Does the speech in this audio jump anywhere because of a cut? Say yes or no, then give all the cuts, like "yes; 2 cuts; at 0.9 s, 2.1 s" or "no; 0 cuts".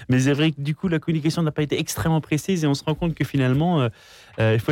no; 0 cuts